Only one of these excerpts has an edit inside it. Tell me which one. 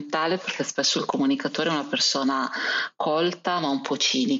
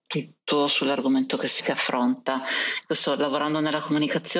second; 1 cut; at 1.6 s

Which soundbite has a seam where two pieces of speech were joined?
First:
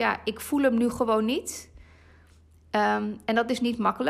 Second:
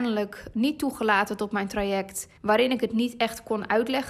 second; 1 cut; at 2.4 s

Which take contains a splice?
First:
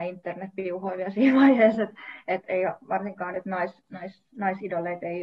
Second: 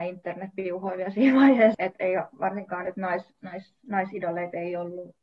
second; 1 cut; at 1.7 s

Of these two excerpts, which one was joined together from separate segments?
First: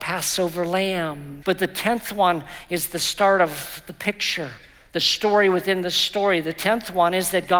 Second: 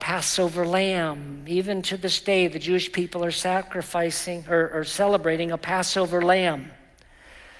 first; 1 cut; at 1.4 s

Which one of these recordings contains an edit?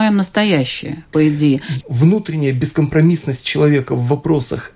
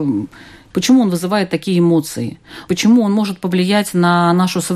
first; 1 cut; at 1.8 s

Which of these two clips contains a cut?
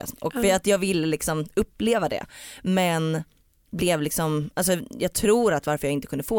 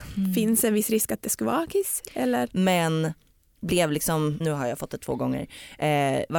second; 2 cuts; at 2.5 s, 4.4 s

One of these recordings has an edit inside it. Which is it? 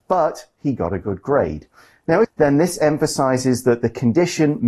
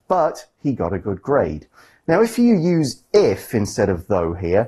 first; 1 cut; at 2.2 s

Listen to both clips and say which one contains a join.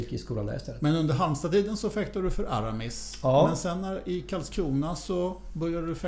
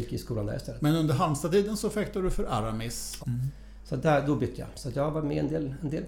second; 1 cut; at 3.2 s

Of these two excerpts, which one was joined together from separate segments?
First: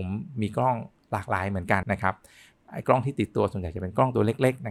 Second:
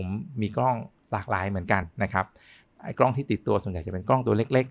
first; 1 cut; at 1.8 s

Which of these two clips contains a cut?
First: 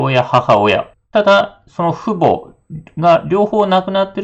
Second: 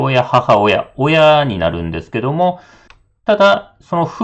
first; 1 cut; at 0.9 s

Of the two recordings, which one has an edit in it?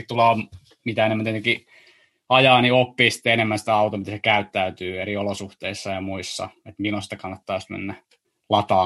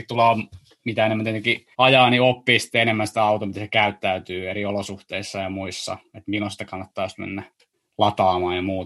second; 1 cut; at 1.7 s

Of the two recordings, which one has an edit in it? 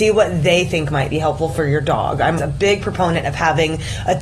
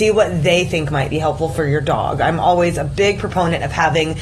first; 1 cut; at 2.4 s

